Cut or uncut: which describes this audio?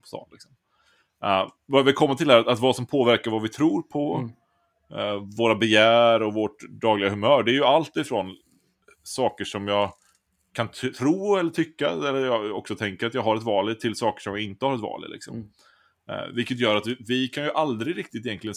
uncut